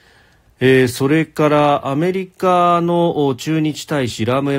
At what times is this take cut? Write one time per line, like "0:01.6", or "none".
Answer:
none